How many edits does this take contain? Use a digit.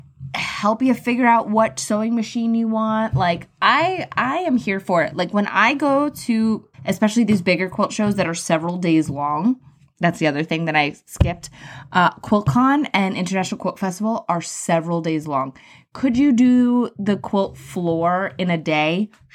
1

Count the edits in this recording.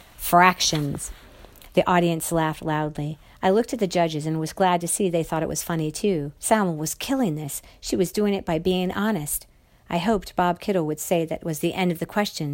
1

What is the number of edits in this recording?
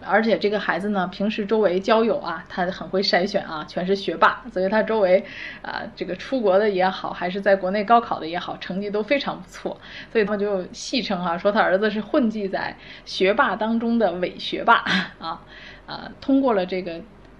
2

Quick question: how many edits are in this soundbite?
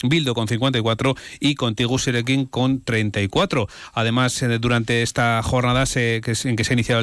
0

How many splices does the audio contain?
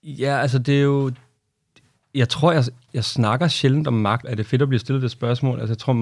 2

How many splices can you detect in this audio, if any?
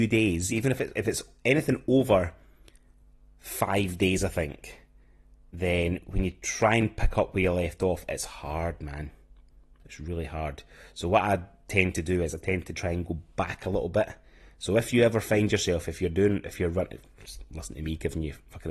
0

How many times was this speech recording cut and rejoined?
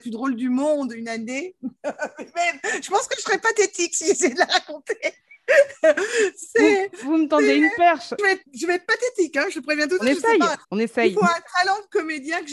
2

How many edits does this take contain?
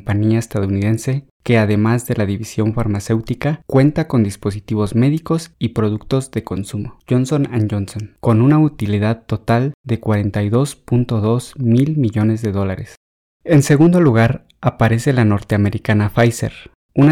0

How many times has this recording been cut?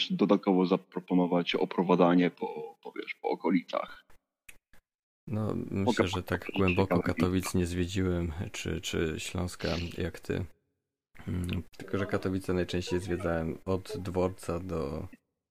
1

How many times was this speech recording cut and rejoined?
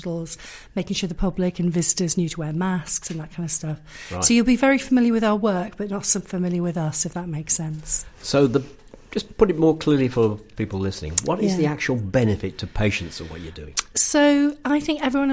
1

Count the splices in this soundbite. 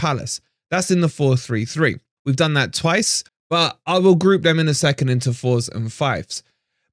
2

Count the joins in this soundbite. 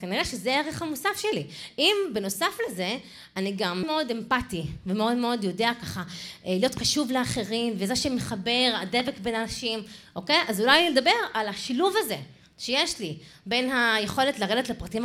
1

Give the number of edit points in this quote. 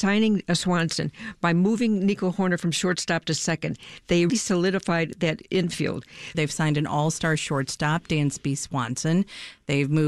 2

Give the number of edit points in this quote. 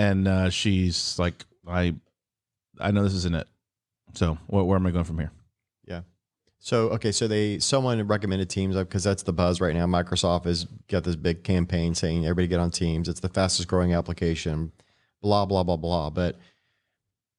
0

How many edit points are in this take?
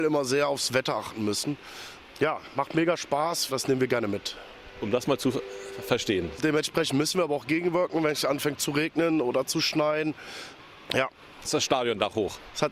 3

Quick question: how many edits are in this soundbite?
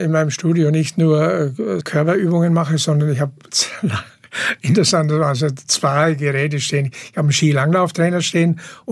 1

